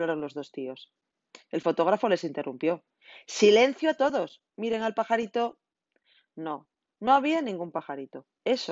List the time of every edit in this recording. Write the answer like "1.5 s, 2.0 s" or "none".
none